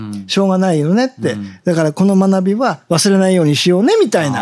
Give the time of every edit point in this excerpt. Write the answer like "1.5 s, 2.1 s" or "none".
none